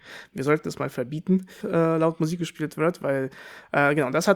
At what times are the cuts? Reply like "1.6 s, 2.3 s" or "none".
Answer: 1.6 s